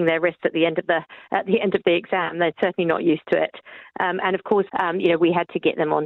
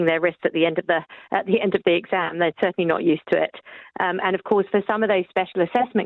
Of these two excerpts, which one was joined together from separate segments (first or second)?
first